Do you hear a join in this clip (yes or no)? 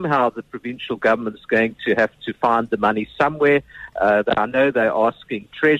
no